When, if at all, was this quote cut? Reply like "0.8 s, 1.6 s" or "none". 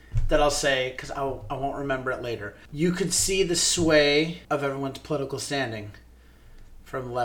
2.7 s, 4.4 s